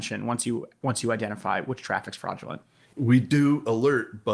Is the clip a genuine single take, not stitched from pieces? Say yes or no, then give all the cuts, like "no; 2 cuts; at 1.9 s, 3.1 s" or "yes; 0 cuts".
yes; 0 cuts